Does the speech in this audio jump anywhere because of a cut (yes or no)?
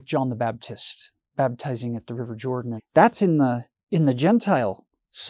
yes